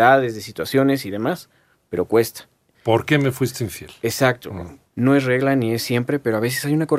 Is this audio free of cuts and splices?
no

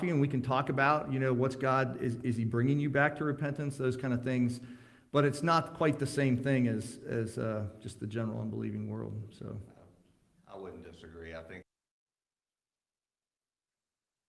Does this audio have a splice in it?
no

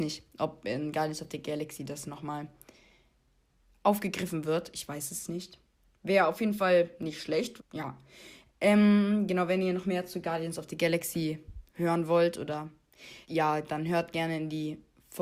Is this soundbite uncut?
no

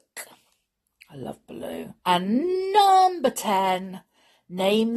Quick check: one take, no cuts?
no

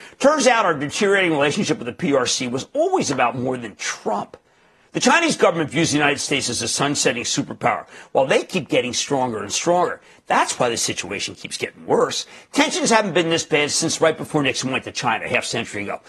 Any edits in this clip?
no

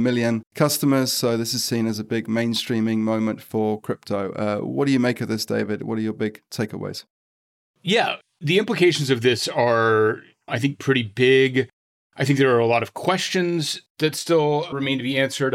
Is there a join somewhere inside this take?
no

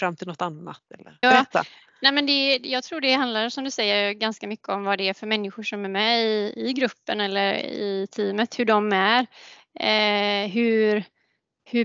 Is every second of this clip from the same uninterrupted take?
no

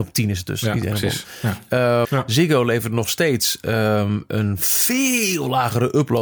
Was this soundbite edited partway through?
yes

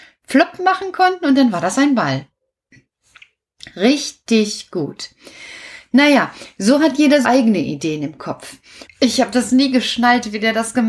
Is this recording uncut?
no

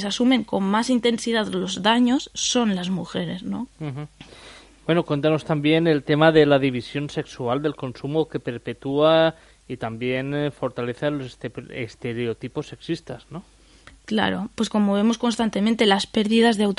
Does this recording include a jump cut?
yes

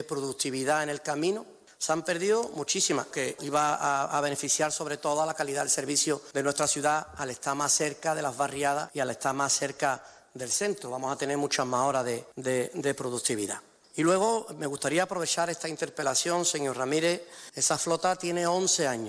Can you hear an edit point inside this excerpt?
yes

